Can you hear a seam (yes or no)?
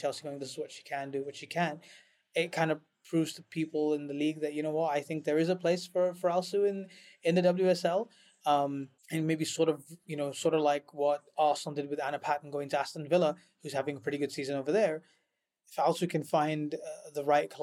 yes